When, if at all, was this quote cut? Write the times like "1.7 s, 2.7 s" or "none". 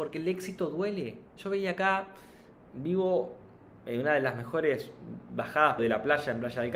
1.3 s, 5.8 s

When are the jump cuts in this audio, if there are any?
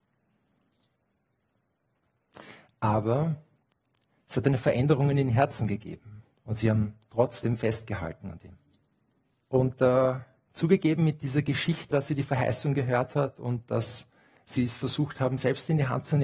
9.3 s, 11.9 s

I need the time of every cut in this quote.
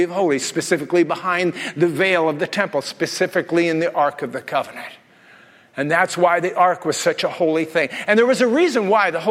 none

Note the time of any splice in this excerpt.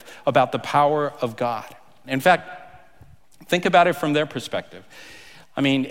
2.0 s

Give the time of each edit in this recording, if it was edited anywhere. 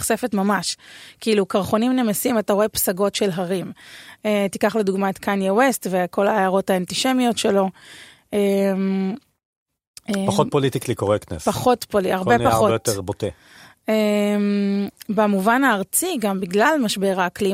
4.2 s

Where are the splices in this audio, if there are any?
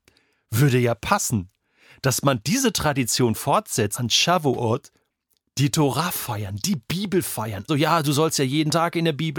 3.9 s, 7.7 s

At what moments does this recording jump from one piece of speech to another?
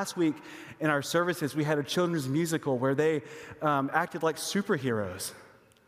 none

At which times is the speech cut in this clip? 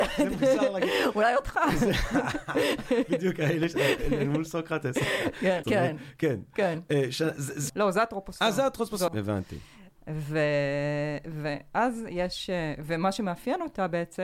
5.6 s, 7.7 s, 9.1 s

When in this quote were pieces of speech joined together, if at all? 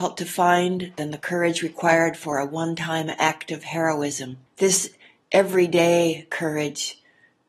4.5 s

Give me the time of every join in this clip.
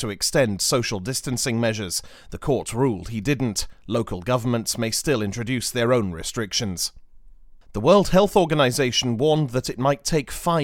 7.6 s

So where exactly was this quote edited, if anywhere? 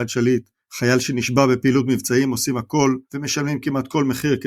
3.0 s

